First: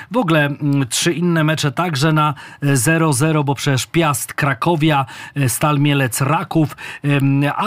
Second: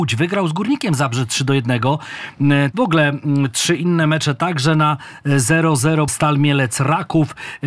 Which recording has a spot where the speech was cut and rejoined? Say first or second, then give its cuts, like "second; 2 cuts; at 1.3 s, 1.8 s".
second; 2 cuts; at 2.7 s, 6.1 s